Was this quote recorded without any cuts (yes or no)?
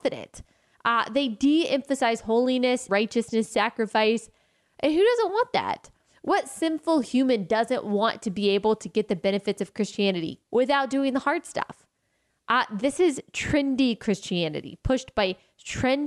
no